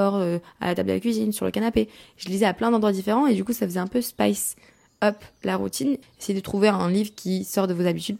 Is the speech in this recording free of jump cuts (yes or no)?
no